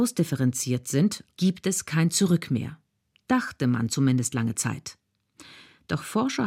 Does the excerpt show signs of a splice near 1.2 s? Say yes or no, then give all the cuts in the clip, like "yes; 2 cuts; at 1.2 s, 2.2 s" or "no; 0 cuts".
yes; 1 cut; at 1.2 s